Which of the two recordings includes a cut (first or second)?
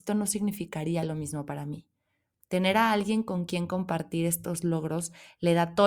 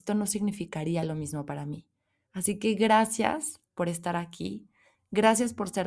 second